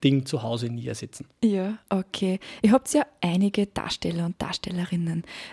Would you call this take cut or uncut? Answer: uncut